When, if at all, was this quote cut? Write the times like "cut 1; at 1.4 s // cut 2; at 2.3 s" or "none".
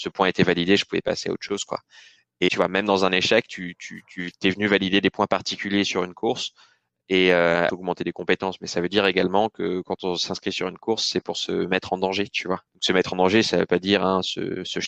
cut 1; at 2.5 s // cut 2; at 7.7 s // cut 3; at 12.7 s